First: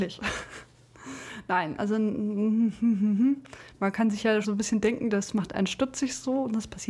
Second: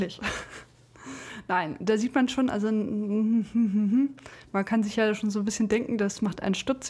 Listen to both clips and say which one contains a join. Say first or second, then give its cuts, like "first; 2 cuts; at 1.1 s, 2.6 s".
first; 2 cuts; at 1.8 s, 4.4 s